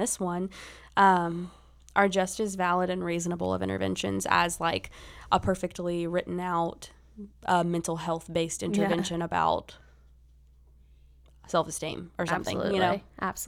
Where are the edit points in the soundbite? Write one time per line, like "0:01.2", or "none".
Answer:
none

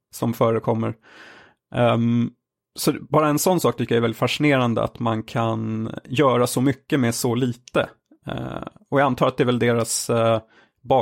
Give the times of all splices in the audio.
none

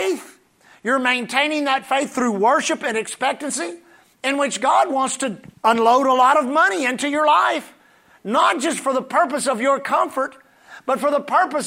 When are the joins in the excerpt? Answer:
0:05.5

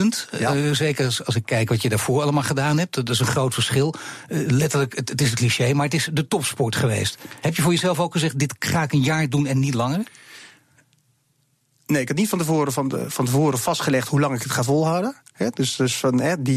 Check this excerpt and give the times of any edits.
none

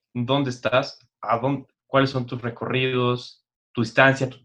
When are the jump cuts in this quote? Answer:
0:01.8

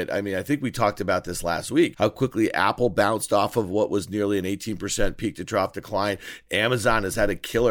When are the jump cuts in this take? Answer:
0:01.9

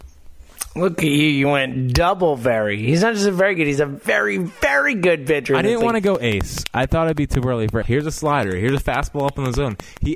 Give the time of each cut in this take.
0:07.8

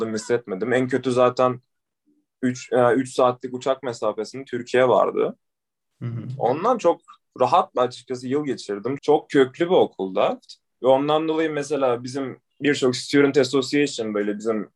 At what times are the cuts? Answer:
0:09.0

